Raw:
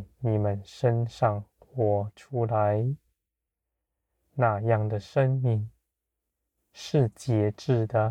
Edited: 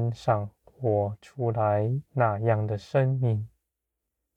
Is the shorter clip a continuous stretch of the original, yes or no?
no